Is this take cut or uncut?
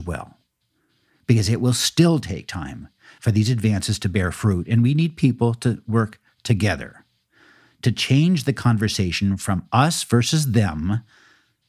uncut